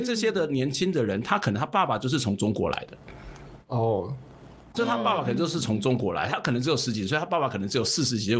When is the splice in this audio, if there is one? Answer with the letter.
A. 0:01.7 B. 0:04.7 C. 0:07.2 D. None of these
B